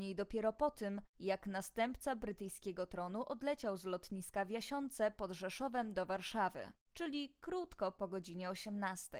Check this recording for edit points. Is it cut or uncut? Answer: uncut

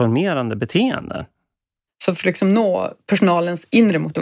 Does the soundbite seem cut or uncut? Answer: cut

